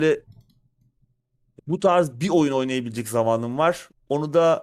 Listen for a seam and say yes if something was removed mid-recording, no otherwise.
yes